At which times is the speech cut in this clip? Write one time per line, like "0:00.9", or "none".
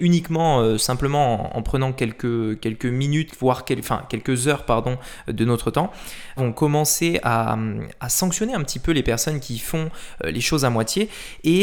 0:06.4